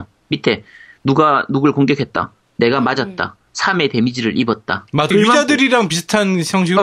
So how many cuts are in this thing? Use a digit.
1